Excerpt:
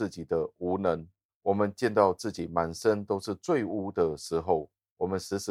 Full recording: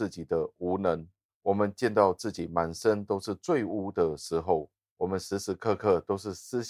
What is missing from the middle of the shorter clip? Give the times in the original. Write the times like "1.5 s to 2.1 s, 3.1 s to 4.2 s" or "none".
none